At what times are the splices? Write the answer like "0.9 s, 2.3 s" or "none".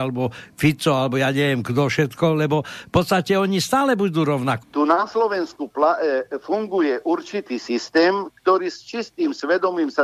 4.6 s